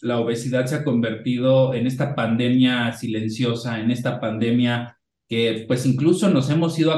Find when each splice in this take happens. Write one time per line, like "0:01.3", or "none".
none